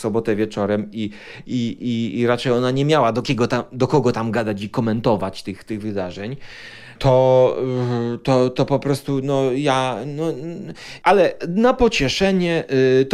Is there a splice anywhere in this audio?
no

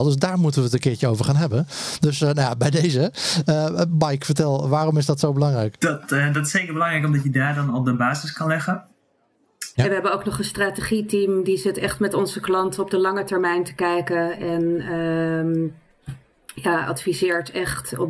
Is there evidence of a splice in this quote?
yes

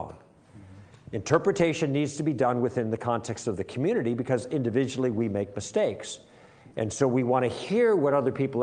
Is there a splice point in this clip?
no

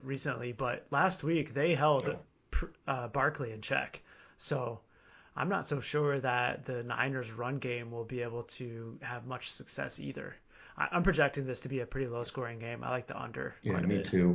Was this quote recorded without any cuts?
yes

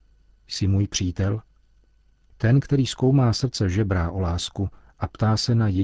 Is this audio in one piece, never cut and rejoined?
yes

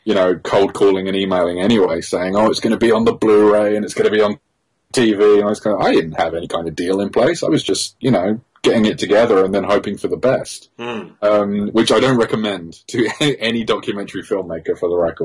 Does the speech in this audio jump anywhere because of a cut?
no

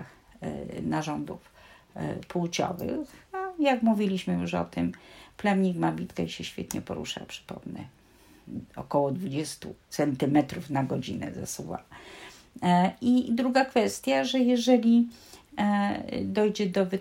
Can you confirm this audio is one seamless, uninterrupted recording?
yes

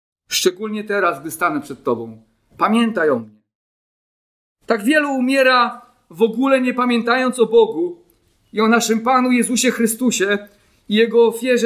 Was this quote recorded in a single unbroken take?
yes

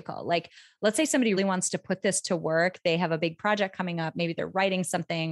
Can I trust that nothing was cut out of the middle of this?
no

